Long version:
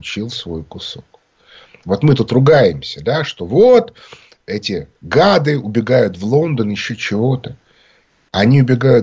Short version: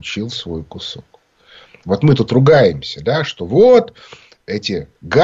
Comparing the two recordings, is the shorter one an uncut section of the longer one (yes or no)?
yes